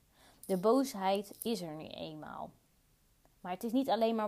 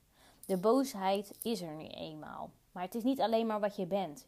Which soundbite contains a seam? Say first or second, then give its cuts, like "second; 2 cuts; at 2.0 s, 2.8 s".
second; 1 cut; at 2.6 s